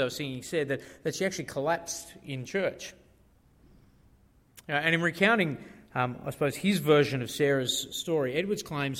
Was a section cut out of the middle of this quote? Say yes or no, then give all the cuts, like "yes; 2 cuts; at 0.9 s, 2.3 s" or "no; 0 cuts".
no; 0 cuts